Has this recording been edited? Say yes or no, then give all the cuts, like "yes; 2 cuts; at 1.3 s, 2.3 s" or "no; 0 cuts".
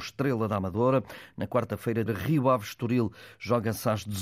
yes; 1 cut; at 2.1 s